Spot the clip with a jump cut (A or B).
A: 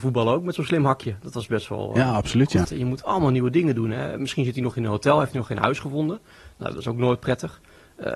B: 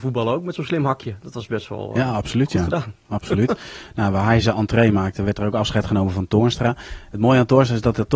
A